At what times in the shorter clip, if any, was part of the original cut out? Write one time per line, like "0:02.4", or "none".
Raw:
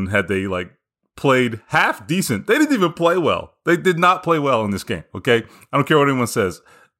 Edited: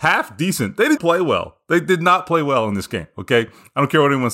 0:01.0